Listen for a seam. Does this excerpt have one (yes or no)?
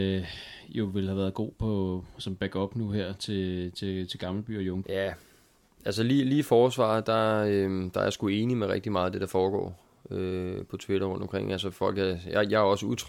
yes